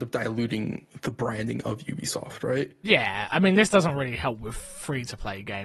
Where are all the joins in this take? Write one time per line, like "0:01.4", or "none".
none

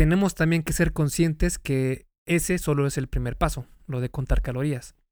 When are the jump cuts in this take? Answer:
none

